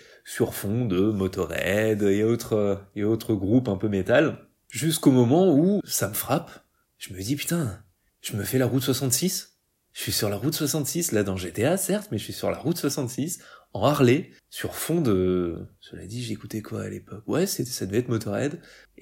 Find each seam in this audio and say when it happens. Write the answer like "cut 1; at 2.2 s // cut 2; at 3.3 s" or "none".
cut 1; at 5.8 s

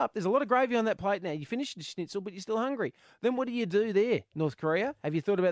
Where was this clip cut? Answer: none

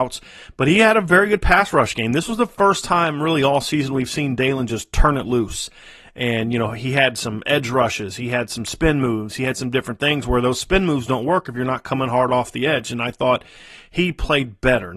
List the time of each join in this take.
none

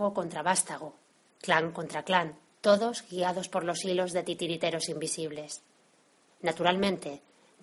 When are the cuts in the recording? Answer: cut 1; at 2.6 s // cut 2; at 6.3 s

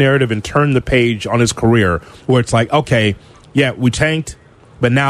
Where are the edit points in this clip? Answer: none

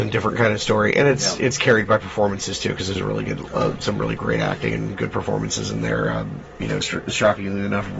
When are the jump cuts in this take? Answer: cut 1; at 6.8 s

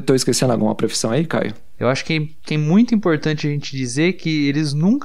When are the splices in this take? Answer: cut 1; at 1.7 s

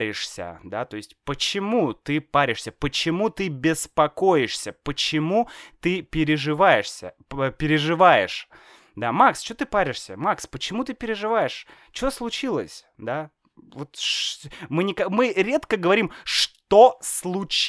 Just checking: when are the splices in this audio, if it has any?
none

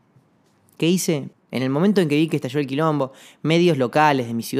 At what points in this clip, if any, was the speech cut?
cut 1; at 1.3 s

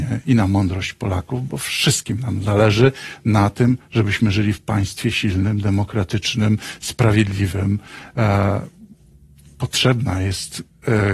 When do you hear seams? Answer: none

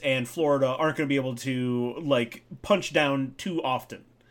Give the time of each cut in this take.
none

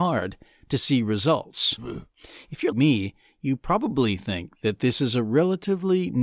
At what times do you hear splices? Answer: cut 1; at 2.7 s

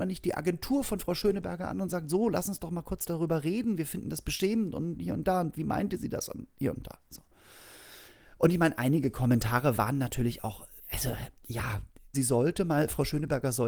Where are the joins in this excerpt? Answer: cut 1; at 10.8 s // cut 2; at 12.1 s

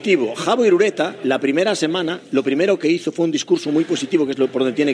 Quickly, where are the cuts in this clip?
none

